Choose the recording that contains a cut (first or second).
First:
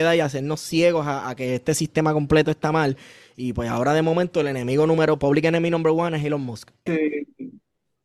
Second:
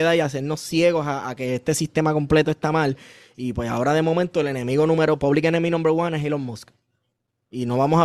first